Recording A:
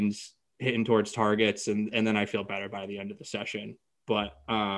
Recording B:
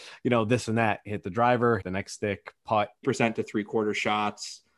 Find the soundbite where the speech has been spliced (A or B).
B